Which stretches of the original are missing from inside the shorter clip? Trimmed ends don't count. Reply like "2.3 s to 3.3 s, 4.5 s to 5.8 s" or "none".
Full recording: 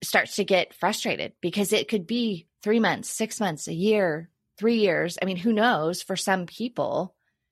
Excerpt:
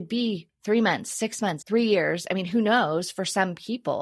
3.6 s to 4.5 s